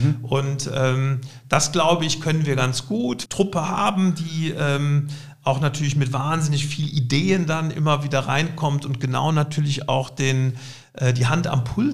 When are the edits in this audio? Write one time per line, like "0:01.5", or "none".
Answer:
0:03.3